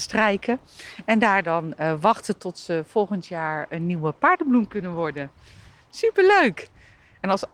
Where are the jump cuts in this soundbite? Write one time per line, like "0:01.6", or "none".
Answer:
none